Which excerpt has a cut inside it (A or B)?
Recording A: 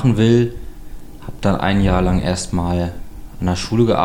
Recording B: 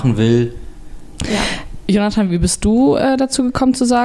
B